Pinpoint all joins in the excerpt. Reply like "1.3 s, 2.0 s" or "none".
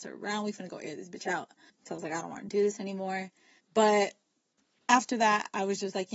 1.8 s, 3.6 s